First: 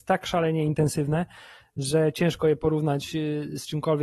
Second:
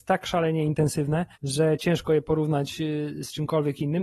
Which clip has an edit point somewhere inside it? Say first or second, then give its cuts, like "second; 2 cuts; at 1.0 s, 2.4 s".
second; 1 cut; at 1.3 s